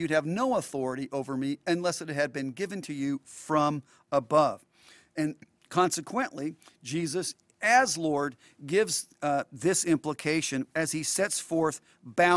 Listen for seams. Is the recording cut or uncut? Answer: uncut